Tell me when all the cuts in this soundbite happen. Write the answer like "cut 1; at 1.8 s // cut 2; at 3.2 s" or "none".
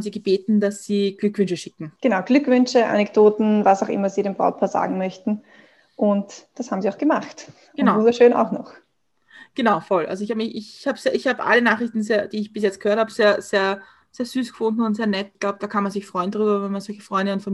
none